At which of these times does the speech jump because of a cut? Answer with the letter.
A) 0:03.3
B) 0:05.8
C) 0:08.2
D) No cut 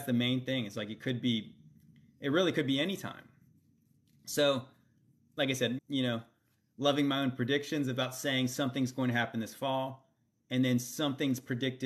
B